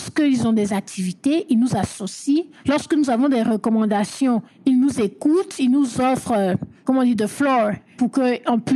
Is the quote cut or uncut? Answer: uncut